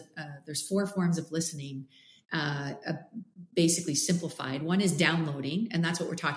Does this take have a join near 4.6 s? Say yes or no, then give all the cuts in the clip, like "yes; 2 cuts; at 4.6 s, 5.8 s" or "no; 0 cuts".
no; 0 cuts